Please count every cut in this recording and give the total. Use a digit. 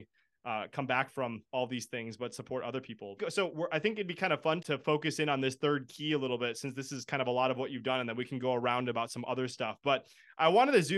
2